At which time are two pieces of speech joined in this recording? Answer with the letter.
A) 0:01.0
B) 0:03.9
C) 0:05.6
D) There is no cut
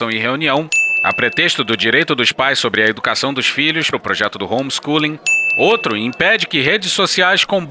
B